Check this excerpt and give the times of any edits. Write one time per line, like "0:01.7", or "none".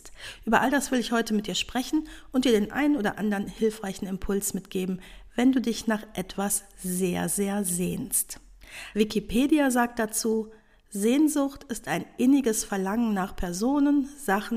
0:08.9